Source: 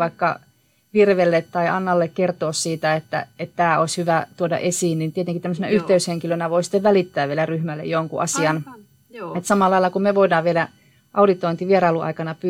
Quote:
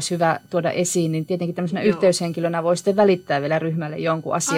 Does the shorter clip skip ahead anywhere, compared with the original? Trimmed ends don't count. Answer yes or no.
no